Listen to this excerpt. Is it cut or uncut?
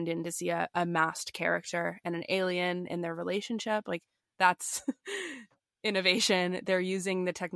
uncut